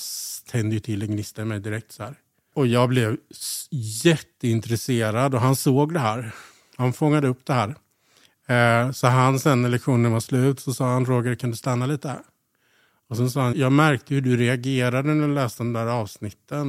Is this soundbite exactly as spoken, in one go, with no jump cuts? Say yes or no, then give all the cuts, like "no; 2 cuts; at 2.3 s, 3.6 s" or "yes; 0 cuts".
no; 1 cut; at 13.5 s